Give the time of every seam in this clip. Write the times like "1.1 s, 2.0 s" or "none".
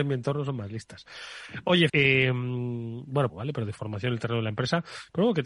1.9 s, 3.3 s